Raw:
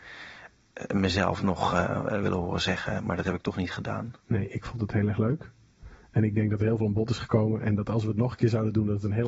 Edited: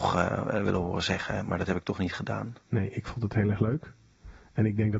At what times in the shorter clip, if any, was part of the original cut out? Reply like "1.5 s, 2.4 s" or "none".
none